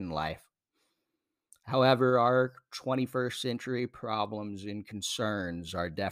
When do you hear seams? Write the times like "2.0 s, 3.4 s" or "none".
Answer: none